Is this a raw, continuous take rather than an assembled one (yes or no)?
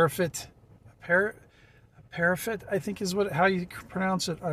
yes